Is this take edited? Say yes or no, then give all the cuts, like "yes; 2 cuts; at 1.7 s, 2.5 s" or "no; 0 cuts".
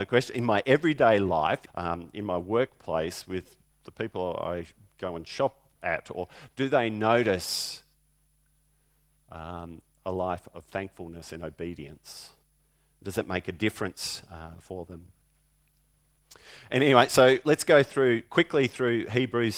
yes; 1 cut; at 1.7 s